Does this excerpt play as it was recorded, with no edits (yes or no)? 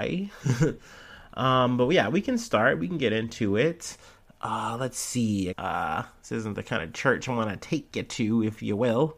no